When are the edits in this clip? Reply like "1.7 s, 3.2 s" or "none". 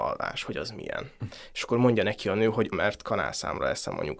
2.7 s

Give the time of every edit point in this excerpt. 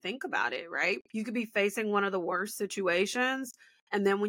none

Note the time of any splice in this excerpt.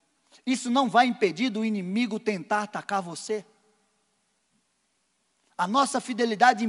none

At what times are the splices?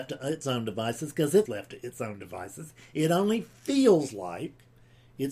1.5 s

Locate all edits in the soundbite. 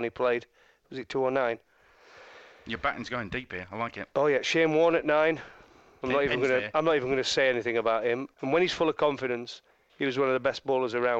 8.3 s

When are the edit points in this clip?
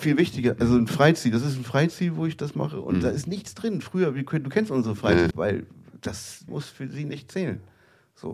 5.3 s, 6.5 s

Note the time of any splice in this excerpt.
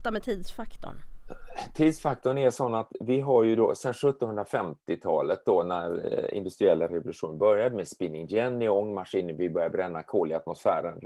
none

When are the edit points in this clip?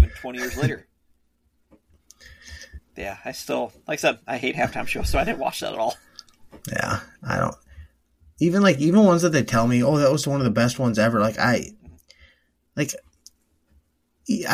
2.8 s

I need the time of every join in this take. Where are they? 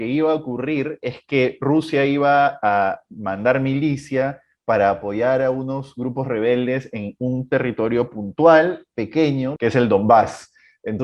9.6 s

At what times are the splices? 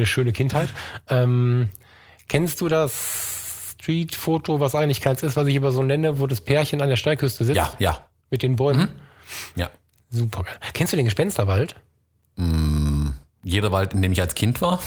9.5 s

